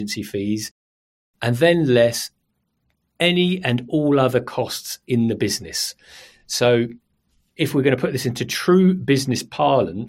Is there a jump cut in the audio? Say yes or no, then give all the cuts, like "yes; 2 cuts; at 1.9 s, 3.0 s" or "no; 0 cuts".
no; 0 cuts